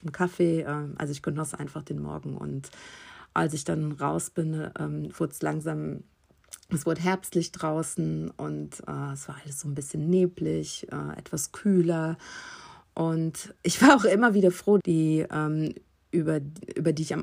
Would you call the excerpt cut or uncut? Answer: cut